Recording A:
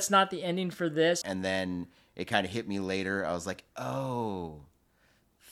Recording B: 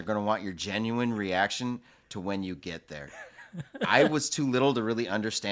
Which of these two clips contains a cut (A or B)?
A